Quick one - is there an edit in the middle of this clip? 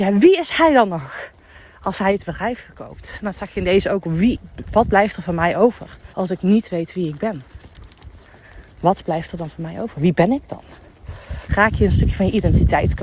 yes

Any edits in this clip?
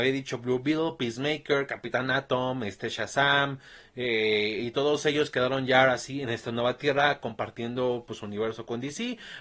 no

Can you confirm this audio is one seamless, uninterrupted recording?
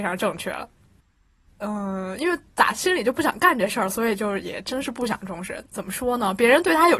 no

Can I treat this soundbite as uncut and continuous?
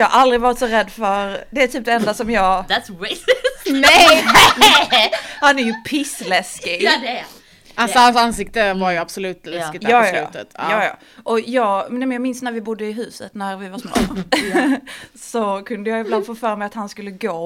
yes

